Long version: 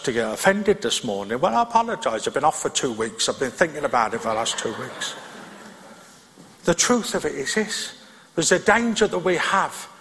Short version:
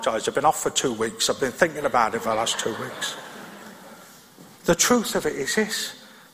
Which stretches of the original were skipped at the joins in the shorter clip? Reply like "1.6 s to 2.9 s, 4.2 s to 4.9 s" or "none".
none